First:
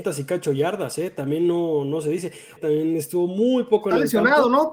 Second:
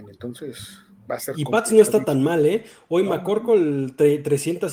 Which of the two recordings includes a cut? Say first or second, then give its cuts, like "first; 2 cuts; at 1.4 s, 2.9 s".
first; 1 cut; at 2.6 s